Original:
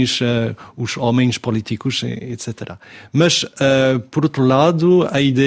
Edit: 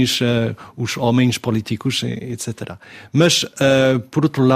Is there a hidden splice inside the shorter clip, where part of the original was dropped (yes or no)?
no